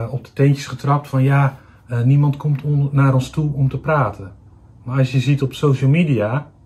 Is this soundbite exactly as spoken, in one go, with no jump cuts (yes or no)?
yes